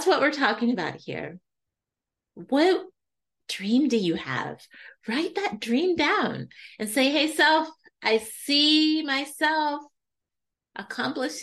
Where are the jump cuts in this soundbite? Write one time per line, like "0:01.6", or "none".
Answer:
none